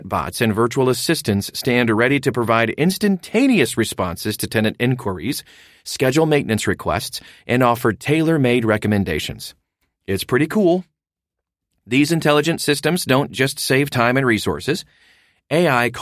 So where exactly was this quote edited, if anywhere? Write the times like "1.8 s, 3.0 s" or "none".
none